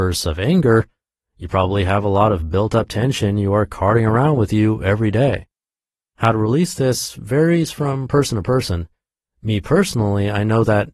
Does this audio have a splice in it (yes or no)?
no